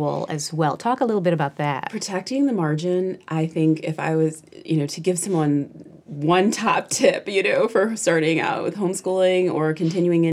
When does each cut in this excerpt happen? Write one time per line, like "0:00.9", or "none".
none